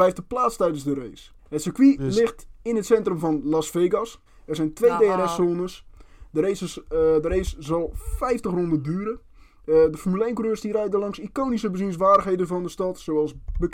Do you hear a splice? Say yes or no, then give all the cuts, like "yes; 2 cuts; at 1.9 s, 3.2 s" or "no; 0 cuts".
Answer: yes; 2 cuts; at 1.4 s, 4.3 s